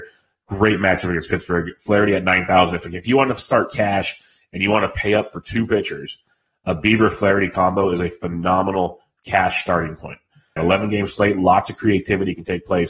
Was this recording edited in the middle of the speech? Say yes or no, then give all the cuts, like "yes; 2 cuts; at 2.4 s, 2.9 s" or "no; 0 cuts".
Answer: yes; 1 cut; at 10.6 s